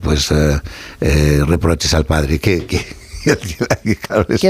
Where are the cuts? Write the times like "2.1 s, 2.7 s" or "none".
none